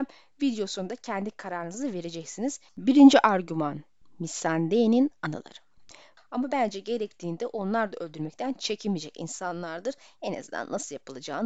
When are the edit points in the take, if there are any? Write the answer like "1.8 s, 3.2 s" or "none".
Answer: 2.7 s, 6.2 s